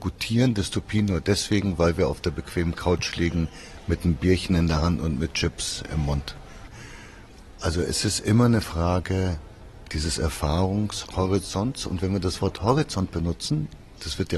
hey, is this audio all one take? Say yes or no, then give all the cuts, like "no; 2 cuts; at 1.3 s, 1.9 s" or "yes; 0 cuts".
yes; 0 cuts